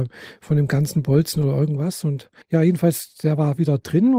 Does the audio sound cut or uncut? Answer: cut